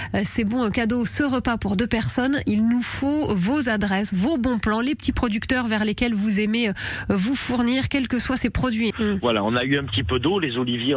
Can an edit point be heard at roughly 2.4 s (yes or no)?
no